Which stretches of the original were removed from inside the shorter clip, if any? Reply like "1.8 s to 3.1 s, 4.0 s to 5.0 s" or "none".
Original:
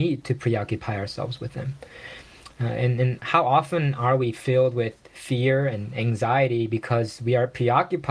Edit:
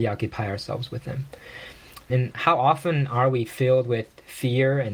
2.6 s to 3.0 s